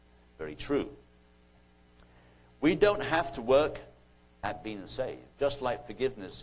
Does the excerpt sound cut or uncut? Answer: cut